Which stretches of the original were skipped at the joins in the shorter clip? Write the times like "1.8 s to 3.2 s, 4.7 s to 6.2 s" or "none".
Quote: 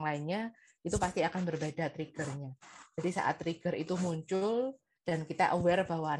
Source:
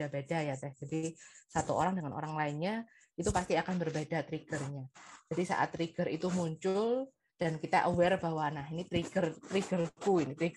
none